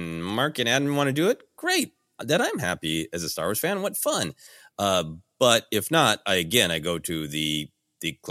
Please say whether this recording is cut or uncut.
uncut